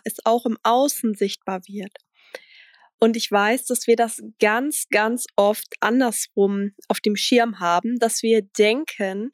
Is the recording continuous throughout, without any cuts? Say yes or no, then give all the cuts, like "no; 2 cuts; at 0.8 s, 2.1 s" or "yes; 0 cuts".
yes; 0 cuts